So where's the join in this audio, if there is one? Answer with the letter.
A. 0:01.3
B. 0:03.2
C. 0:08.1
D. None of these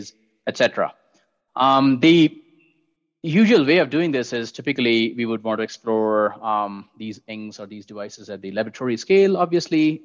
D